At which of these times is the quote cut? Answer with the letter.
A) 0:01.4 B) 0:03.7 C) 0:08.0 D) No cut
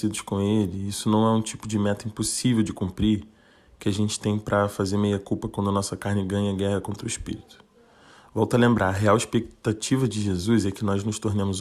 D